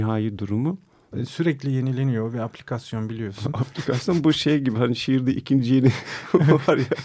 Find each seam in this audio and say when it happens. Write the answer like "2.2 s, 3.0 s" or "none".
1.1 s